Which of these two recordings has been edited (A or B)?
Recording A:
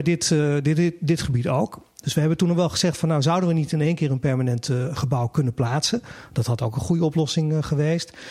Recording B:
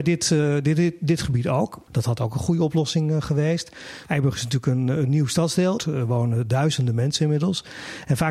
B